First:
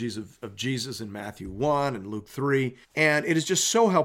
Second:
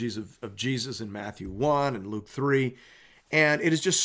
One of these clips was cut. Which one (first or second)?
first